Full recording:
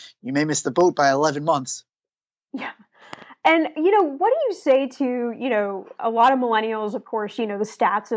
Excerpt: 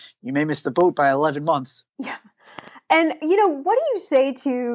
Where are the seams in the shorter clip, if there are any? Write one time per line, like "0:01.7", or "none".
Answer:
0:01.9